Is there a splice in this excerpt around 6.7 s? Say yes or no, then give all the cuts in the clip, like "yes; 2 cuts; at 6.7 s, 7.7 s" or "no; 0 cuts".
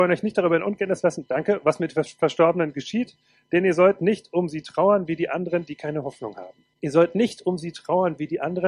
yes; 1 cut; at 6.7 s